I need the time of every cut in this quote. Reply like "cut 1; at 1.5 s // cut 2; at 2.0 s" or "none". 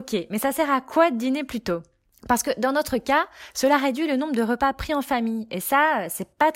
none